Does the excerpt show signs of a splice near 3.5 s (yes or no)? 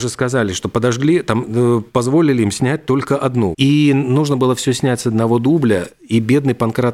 yes